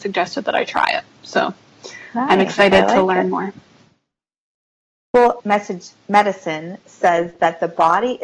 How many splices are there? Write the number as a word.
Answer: one